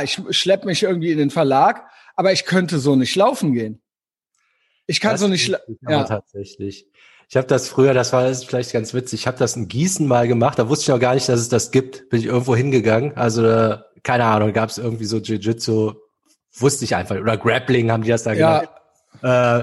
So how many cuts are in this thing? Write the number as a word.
zero